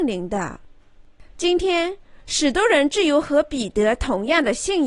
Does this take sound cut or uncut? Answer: cut